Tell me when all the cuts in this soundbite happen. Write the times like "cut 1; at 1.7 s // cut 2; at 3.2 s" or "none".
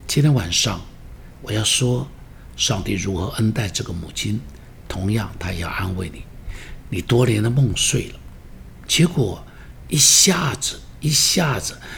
cut 1; at 6.8 s // cut 2; at 8.9 s